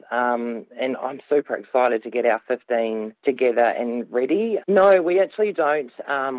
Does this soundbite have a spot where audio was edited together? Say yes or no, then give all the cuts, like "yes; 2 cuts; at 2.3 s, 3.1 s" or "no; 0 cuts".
yes; 1 cut; at 4.6 s